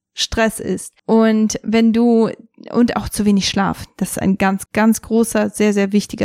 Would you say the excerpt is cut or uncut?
cut